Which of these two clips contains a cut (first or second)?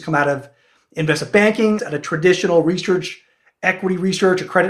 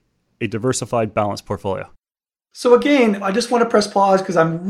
first